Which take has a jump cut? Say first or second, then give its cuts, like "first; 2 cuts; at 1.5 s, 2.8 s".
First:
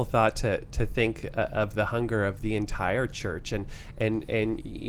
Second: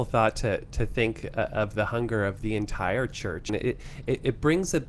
second; 1 cut; at 3.5 s